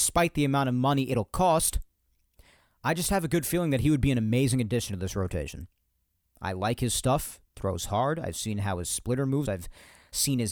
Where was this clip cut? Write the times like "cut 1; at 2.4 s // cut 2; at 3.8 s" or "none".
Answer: cut 1; at 6.3 s // cut 2; at 9.4 s